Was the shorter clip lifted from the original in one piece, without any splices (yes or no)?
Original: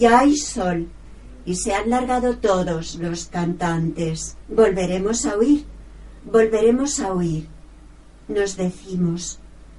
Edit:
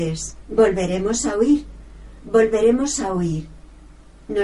yes